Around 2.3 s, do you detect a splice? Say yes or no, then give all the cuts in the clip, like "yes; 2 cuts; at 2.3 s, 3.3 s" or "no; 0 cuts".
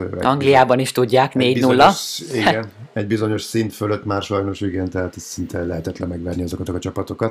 no; 0 cuts